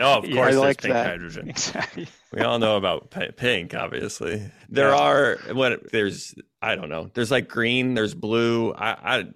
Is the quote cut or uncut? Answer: cut